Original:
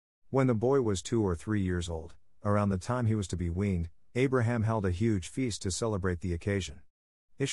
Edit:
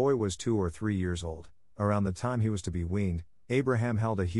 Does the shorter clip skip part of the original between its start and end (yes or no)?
no